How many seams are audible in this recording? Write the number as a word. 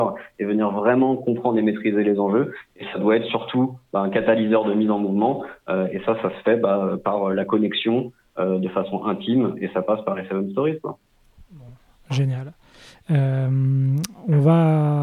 zero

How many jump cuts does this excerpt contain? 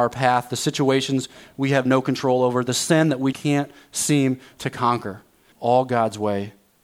two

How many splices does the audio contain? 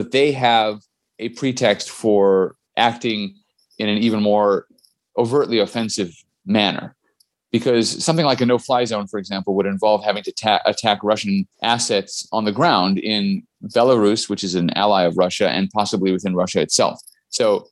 two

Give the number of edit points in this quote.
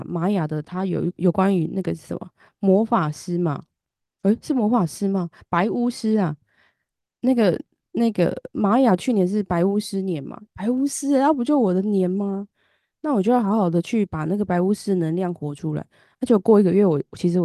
one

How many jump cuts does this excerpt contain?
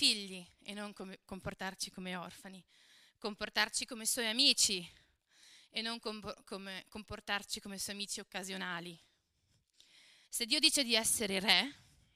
one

